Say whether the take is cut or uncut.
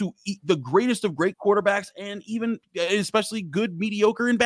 uncut